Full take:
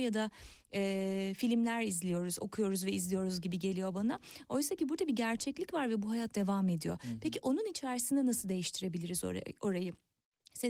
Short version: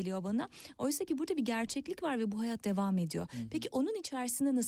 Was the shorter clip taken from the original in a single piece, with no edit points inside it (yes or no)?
yes